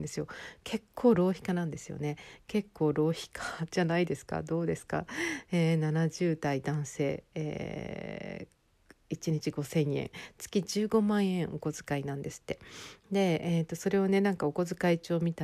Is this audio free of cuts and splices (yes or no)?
yes